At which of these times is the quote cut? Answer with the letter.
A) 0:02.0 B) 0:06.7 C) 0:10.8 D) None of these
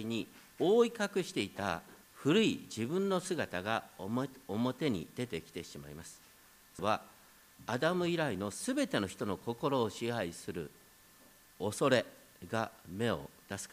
A